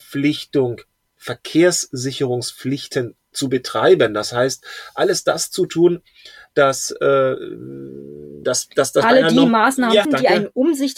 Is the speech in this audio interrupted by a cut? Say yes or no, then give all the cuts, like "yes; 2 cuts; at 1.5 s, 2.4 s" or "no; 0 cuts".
yes; 2 cuts; at 8.4 s, 10.0 s